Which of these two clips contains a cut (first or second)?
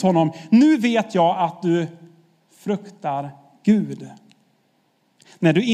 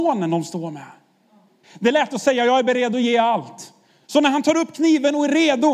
second